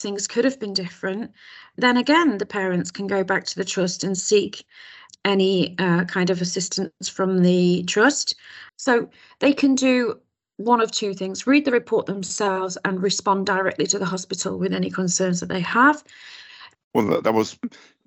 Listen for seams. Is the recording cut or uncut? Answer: cut